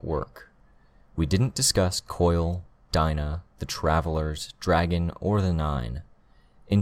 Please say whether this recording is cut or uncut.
uncut